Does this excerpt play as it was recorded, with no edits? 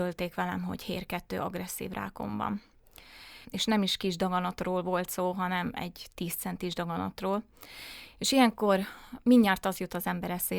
no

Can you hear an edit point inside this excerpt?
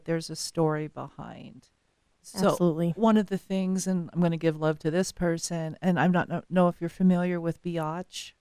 no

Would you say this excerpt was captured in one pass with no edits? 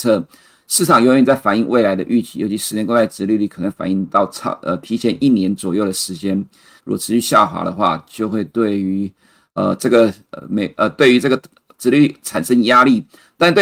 no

